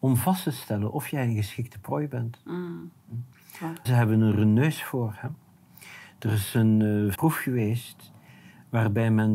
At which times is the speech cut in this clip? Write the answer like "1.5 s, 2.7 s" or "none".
3.8 s, 7.1 s